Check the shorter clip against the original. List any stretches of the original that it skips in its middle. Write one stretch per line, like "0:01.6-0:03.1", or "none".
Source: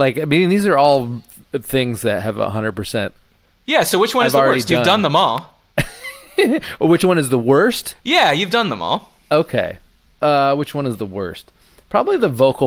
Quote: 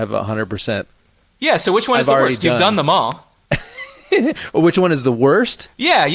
none